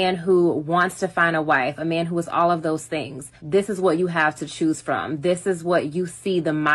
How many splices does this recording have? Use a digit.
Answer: 1